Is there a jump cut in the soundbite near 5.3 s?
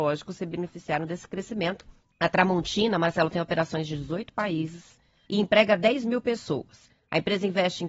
yes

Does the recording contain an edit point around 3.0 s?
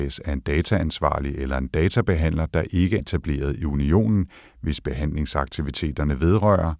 yes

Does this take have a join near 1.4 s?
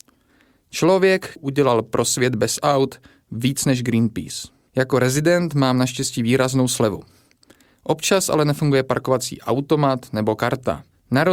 yes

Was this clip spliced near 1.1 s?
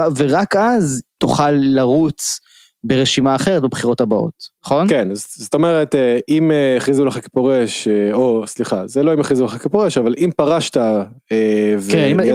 yes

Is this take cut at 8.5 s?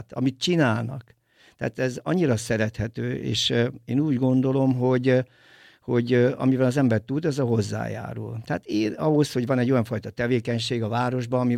no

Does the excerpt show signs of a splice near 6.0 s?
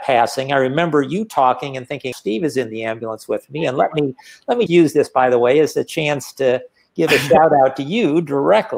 no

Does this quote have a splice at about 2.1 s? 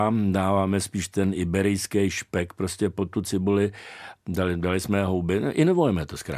no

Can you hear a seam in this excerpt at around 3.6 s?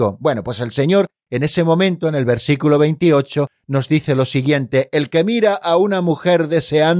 no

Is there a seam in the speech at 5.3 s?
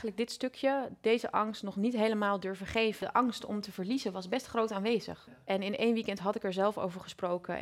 yes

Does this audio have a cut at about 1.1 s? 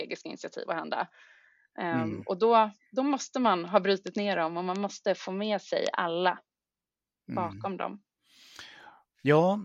no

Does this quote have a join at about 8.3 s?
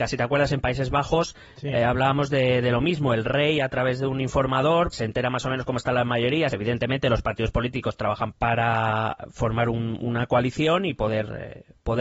yes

